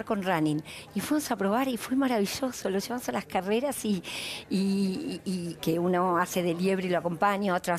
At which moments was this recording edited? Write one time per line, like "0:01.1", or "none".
0:05.6